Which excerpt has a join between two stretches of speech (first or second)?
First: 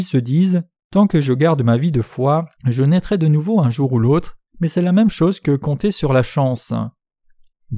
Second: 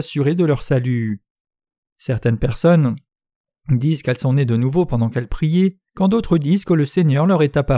first